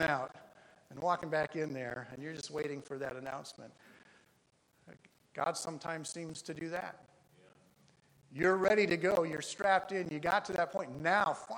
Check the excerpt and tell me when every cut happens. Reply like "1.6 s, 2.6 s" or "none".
none